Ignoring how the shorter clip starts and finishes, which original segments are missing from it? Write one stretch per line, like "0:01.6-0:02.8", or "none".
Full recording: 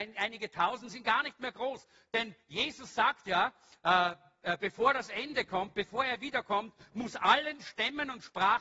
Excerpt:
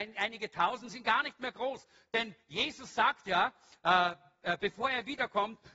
0:04.6-0:05.7